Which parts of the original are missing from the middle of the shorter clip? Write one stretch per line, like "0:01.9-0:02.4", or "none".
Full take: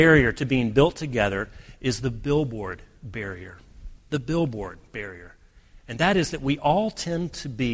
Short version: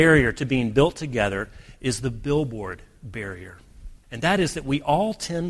0:04.0-0:05.8